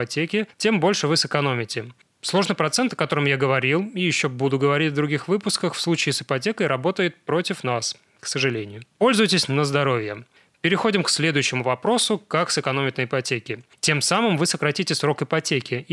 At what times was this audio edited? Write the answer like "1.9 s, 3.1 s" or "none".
8.9 s, 13.8 s